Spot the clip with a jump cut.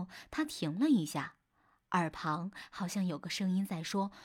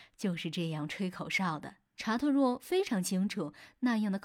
second; 1 cut; at 1.8 s

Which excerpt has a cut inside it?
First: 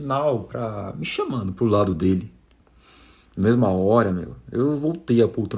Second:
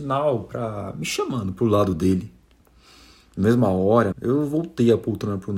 second; 1 cut; at 4.1 s

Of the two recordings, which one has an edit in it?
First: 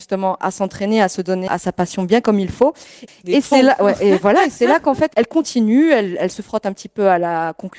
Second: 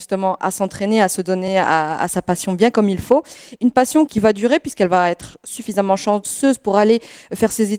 first; 2 cuts; at 1.5 s, 3.1 s

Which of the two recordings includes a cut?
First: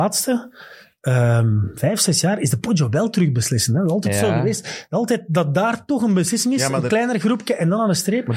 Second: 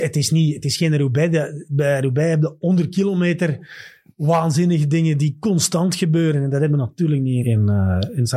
second; 1 cut; at 7.4 s

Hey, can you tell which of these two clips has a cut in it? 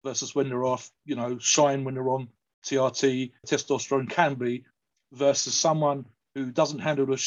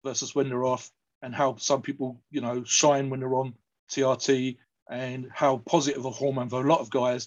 first; 2 cuts; at 1.0 s, 3.4 s

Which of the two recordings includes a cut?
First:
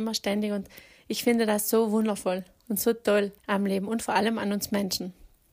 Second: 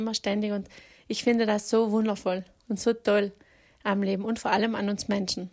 first; 1 cut; at 3.4 s

